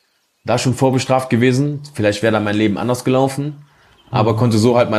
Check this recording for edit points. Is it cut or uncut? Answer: uncut